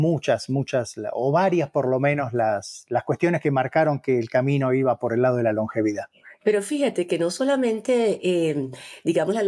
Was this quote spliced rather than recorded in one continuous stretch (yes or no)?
no